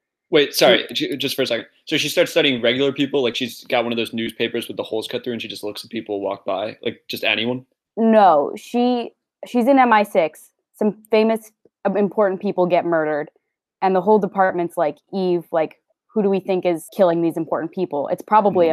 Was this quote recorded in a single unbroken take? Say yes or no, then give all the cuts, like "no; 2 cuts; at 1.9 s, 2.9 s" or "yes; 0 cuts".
yes; 0 cuts